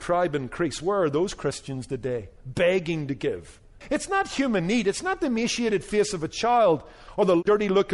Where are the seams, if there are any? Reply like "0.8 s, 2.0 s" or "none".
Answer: 3.8 s